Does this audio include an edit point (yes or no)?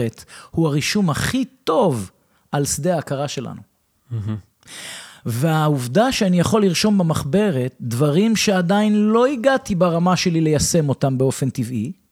no